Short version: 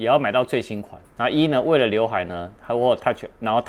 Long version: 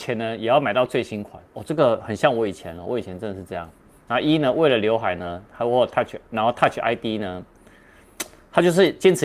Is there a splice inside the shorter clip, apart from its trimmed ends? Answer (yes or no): yes